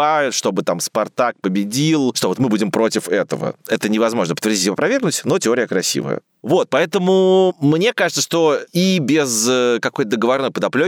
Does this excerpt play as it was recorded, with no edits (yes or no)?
yes